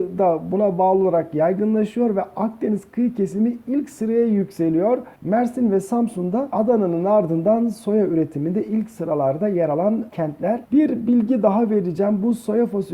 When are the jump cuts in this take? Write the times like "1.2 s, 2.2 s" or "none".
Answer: 5.2 s